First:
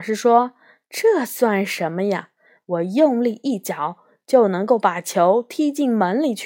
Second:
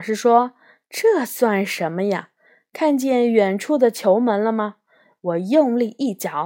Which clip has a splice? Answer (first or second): first